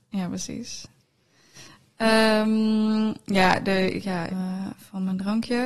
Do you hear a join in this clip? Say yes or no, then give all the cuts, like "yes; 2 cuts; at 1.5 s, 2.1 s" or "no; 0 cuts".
yes; 1 cut; at 4.3 s